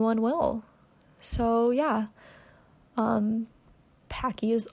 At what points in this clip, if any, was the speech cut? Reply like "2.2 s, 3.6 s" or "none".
none